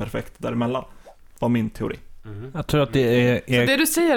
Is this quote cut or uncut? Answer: uncut